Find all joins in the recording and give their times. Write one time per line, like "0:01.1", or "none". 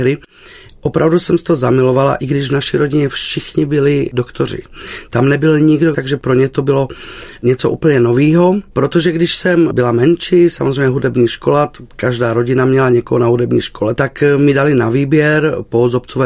0:05.9
0:08.7
0:14.0